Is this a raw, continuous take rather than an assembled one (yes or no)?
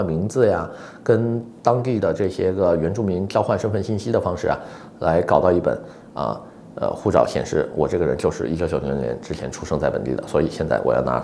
yes